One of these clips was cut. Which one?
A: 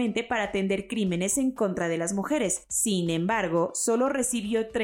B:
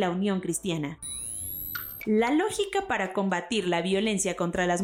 B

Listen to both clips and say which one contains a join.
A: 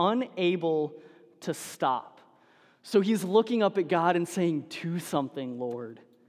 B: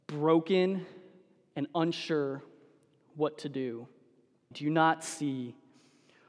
B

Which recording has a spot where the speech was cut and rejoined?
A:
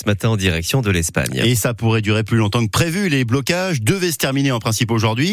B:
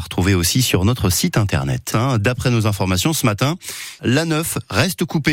B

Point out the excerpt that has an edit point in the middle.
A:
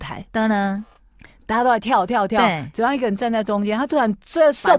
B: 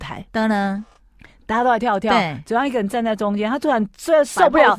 B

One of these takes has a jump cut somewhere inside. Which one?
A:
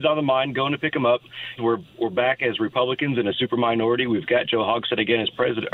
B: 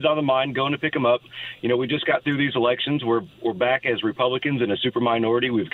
A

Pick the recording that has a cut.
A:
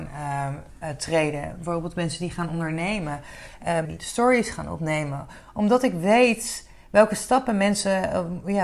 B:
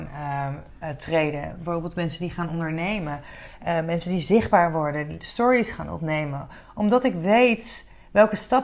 A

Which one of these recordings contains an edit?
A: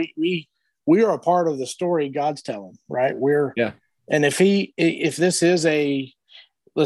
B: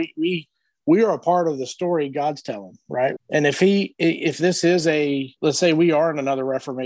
B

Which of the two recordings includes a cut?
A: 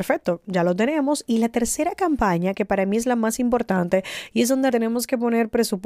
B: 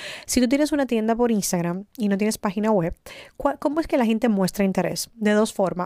A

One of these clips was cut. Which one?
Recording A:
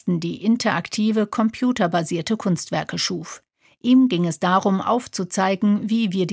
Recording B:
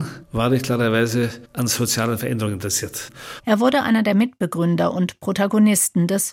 B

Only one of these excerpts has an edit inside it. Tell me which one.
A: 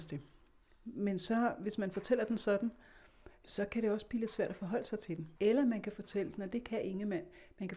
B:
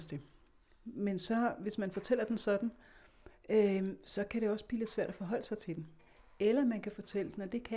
A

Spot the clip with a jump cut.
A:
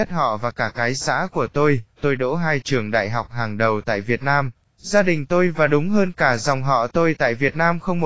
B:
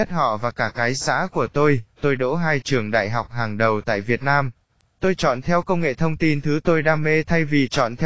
A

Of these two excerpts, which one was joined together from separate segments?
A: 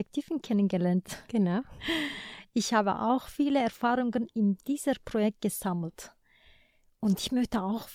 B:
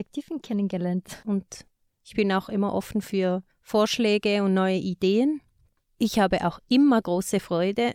B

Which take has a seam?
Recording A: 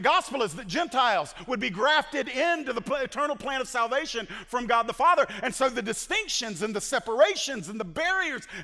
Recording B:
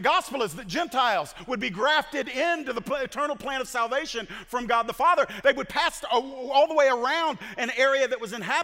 B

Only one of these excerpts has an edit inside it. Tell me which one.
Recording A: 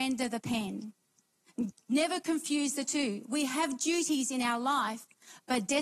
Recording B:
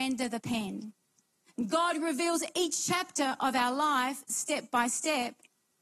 A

